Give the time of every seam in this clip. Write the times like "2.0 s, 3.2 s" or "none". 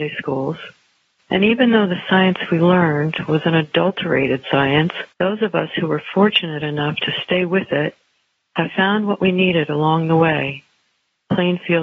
1.2 s, 5.1 s